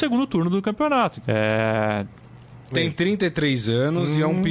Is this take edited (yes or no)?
yes